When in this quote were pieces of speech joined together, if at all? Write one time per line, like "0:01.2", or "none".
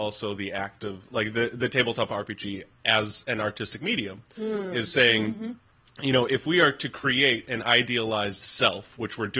none